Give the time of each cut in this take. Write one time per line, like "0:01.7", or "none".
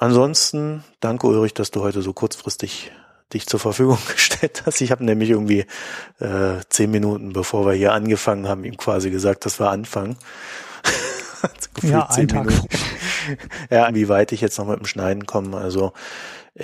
0:12.6
0:13.9